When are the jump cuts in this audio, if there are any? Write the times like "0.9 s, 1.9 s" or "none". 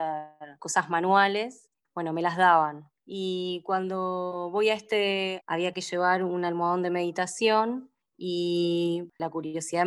1.8 s, 5.4 s